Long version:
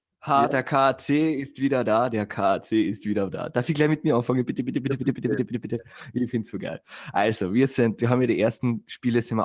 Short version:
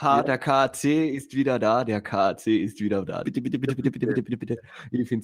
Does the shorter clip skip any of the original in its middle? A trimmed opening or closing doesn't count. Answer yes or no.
yes